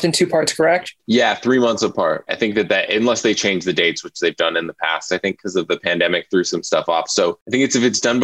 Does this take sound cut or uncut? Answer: cut